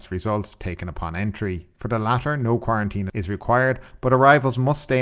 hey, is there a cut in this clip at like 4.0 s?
no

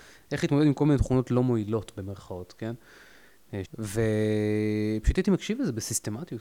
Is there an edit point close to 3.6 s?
yes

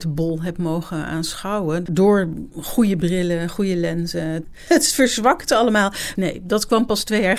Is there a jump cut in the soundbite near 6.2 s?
yes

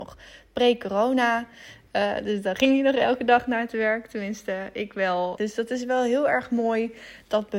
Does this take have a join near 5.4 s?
yes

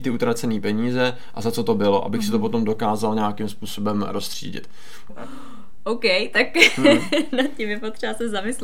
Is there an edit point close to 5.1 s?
yes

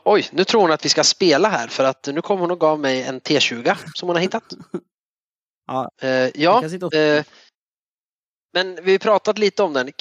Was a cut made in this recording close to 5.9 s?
no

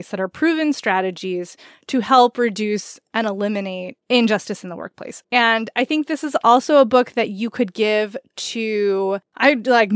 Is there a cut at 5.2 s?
yes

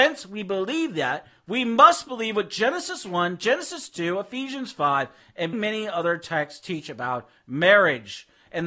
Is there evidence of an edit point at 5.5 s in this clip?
yes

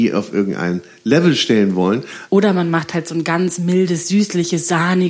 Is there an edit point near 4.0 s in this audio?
no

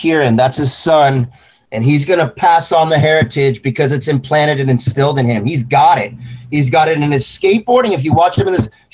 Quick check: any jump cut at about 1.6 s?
no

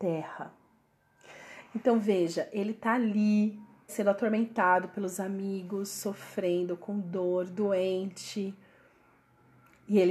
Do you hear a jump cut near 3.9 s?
yes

